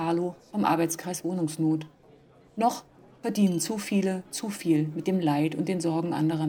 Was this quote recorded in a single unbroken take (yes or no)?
yes